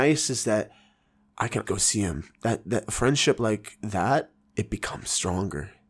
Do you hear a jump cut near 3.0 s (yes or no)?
no